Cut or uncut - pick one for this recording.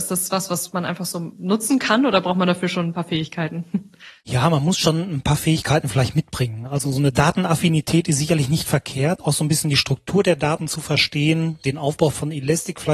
uncut